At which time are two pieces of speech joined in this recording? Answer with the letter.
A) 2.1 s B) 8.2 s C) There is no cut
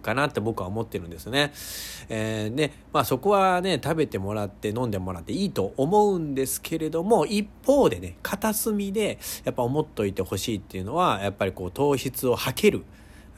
C